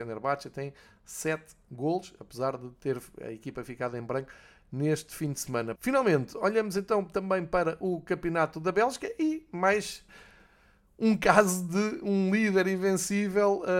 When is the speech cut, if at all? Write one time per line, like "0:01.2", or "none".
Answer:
0:05.8